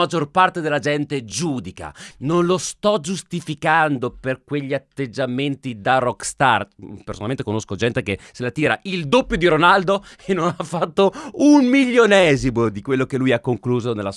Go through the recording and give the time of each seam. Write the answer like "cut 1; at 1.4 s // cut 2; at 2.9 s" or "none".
cut 1; at 2.1 s